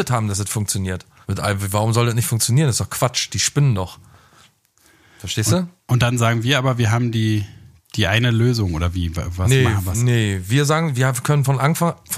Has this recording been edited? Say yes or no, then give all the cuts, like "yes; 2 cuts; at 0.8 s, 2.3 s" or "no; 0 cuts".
yes; 1 cut; at 1.2 s